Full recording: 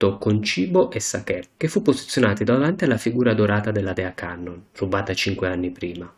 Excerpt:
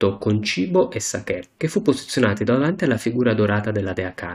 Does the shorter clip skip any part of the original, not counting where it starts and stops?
no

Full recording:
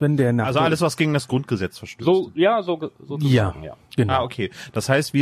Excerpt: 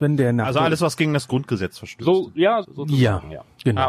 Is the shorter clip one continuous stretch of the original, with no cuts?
no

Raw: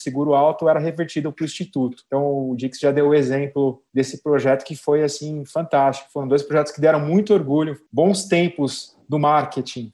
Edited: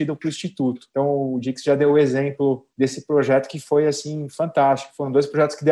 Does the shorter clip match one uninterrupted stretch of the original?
yes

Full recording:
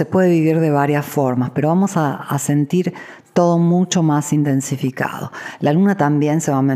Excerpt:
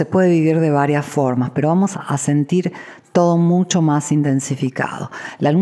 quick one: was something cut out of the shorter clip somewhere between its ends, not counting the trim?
yes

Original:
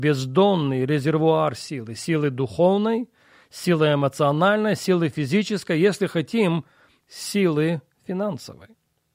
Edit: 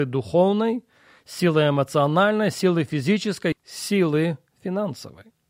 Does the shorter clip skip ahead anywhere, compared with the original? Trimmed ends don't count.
yes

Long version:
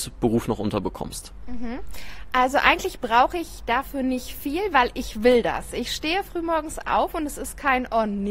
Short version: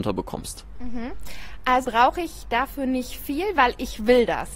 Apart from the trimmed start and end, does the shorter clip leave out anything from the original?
yes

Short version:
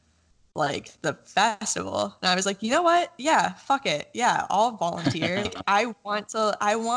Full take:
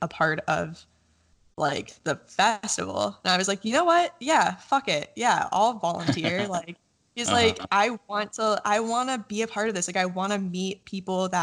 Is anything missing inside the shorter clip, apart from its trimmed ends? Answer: yes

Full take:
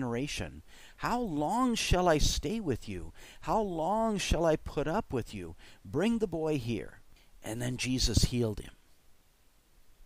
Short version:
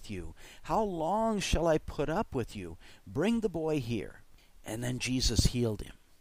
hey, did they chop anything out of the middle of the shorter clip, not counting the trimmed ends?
no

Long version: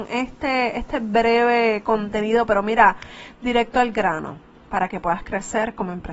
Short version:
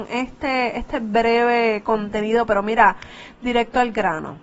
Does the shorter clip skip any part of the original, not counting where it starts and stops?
no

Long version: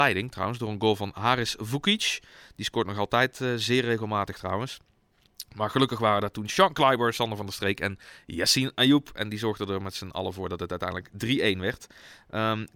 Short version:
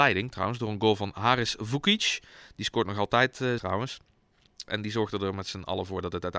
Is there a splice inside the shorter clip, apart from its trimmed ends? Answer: yes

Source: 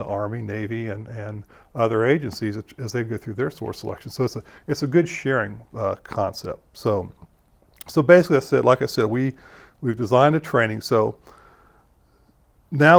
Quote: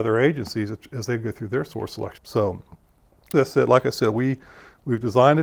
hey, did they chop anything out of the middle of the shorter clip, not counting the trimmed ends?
yes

